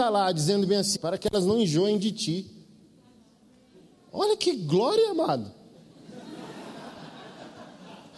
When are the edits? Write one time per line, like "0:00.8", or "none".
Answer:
0:00.9